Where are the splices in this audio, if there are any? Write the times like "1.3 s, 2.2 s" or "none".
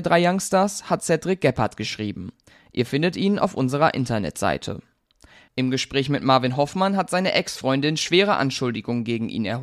5.5 s